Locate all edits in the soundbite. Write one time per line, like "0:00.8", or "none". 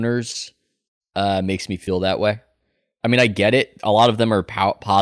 none